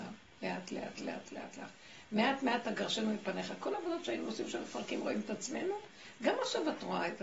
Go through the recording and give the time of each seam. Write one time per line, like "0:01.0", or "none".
0:01.2